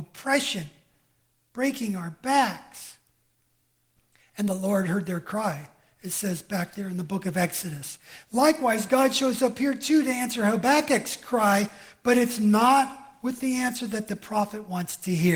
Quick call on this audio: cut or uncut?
uncut